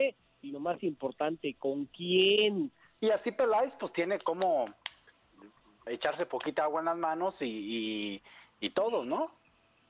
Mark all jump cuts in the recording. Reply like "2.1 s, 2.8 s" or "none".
3.0 s, 5.9 s